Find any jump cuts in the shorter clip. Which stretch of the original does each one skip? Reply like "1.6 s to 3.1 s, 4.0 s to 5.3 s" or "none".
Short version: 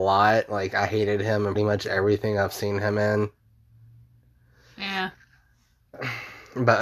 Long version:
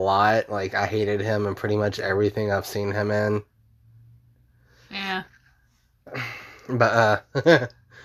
1.6 s to 1.7 s